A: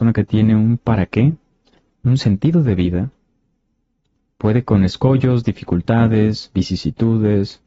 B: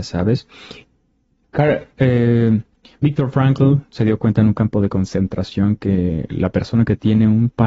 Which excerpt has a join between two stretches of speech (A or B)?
B